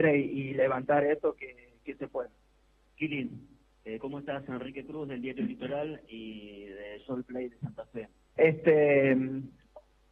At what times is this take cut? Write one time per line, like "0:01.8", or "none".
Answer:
0:08.4